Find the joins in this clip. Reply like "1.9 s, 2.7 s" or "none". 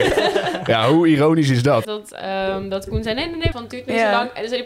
1.8 s, 3.5 s

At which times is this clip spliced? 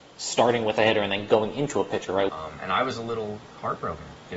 2.3 s

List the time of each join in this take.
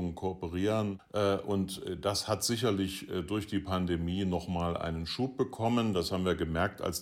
1.0 s

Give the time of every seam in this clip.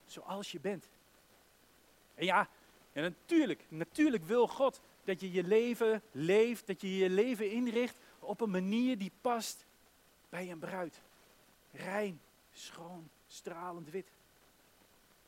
none

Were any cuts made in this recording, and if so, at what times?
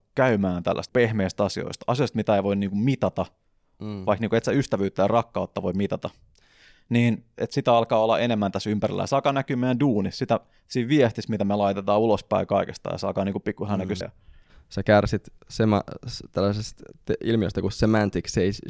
14.0 s

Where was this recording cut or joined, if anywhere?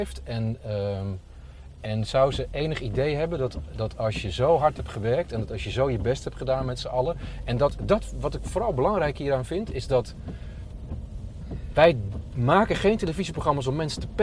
none

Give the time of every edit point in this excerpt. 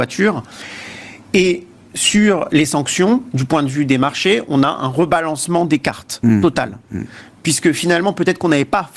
1.2 s

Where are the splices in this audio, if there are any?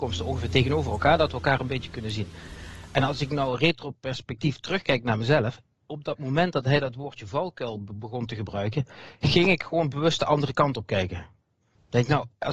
none

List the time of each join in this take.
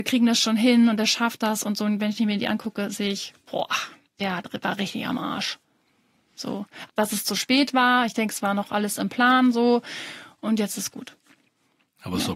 4.1 s, 6.9 s

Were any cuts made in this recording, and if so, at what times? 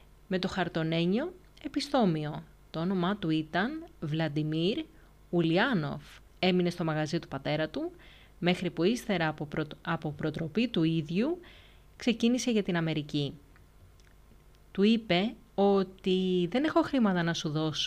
6.3 s

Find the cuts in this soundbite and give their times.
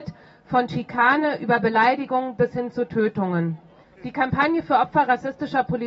3.8 s

